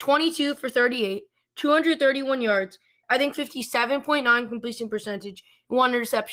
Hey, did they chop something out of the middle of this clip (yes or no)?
yes